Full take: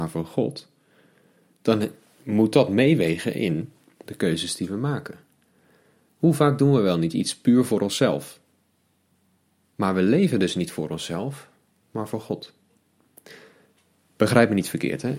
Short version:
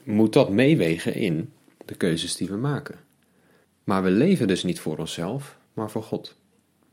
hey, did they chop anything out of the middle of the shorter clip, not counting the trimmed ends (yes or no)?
yes